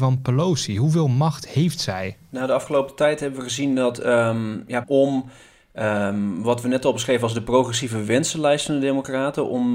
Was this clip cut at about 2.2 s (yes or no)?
no